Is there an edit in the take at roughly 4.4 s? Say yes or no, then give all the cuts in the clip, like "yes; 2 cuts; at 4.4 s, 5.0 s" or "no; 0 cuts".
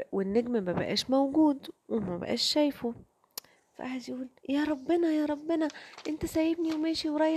yes; 1 cut; at 4.4 s